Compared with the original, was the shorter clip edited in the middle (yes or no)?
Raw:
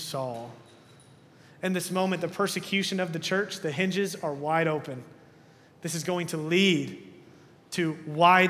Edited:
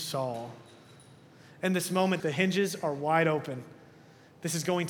yes